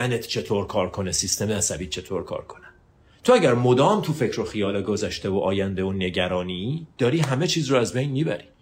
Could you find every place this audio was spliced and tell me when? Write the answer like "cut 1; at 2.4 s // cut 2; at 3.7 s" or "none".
none